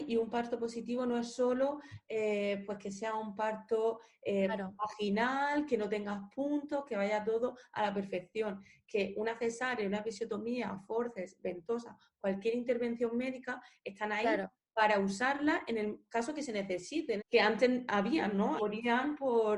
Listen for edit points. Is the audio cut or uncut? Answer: cut